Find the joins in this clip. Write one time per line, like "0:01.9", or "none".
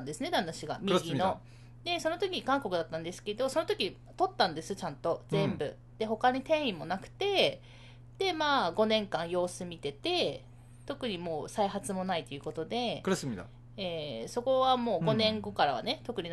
none